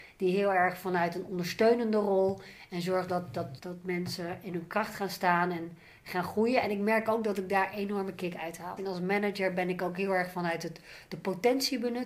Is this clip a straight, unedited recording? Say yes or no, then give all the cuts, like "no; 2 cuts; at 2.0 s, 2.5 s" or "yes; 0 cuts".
no; 2 cuts; at 3.6 s, 8.8 s